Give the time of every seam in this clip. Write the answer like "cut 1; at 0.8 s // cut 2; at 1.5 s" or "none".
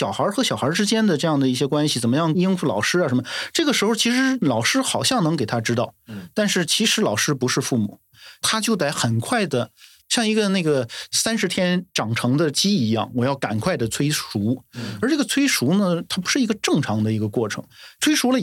none